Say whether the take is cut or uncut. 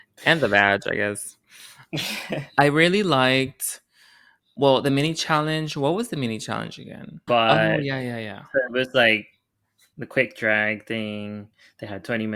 cut